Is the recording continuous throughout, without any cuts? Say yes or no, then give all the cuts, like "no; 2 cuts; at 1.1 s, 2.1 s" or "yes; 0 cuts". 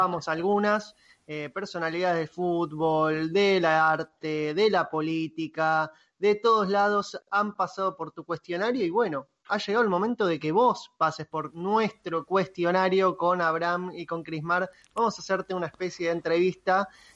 yes; 0 cuts